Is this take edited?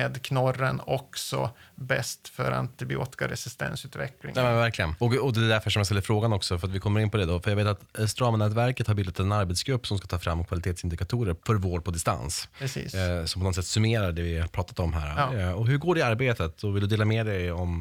no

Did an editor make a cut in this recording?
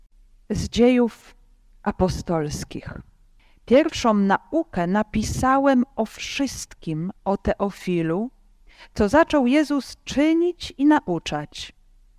no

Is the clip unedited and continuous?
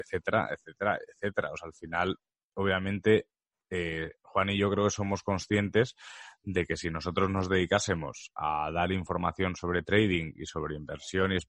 yes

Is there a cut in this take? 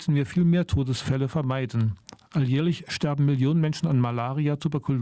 no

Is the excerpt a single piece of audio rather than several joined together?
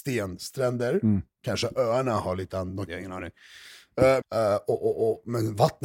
no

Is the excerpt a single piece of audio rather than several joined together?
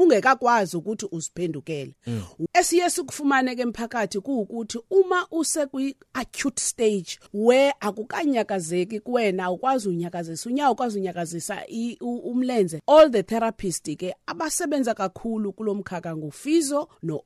no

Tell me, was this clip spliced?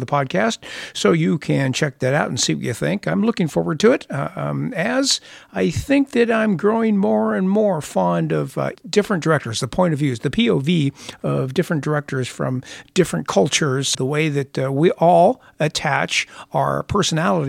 yes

